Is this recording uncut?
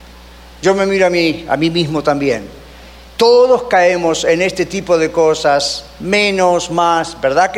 yes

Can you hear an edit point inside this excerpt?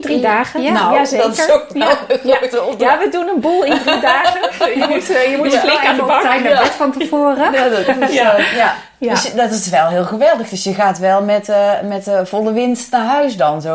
no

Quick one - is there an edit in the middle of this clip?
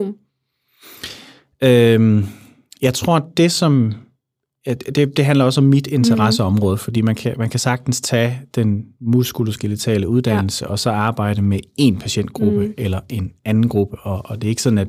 no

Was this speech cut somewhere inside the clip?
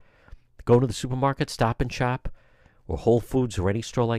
no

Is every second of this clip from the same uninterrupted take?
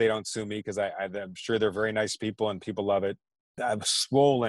no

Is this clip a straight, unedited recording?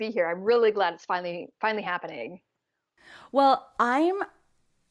yes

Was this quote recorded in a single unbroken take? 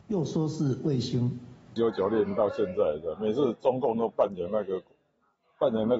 no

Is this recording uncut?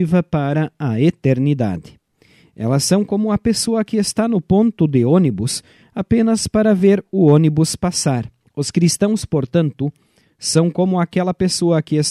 no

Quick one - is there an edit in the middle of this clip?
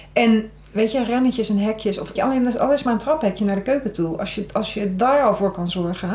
yes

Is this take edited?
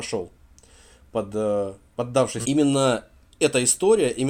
yes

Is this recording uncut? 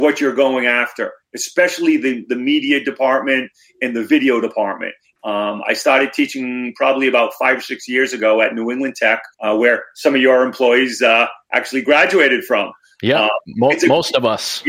no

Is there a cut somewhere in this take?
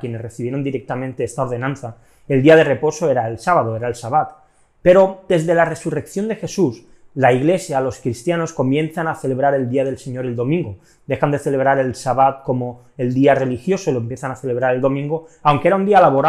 no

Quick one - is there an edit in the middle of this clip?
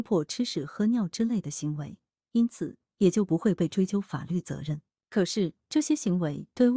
yes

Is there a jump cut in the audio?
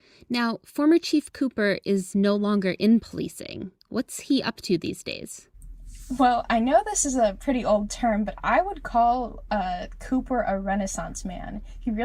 no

